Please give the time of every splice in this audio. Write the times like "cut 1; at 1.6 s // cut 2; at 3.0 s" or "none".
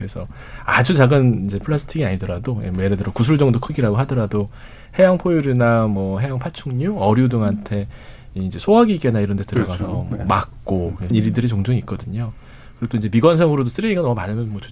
cut 1; at 11.1 s